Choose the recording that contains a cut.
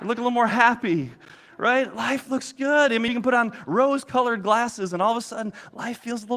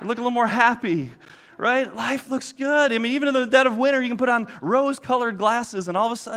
first; 1 cut; at 3.1 s

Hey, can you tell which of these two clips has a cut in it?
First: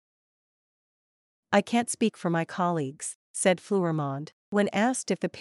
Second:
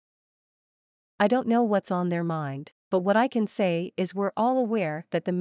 second; 1 cut; at 1.1 s

